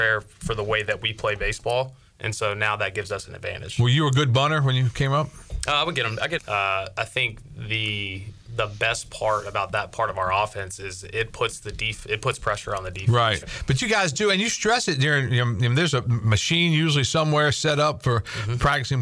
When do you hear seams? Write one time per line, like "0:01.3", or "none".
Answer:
0:06.4
0:13.4